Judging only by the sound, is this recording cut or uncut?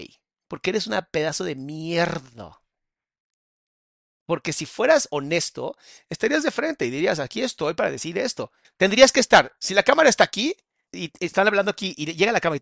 cut